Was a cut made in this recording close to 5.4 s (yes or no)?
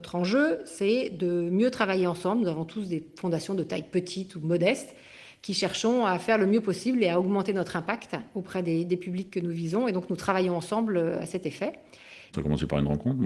no